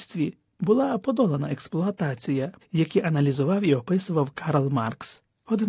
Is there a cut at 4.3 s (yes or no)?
no